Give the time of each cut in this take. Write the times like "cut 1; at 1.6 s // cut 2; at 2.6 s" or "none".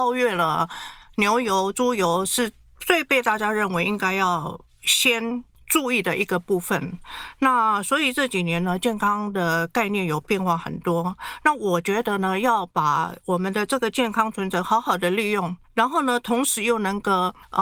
none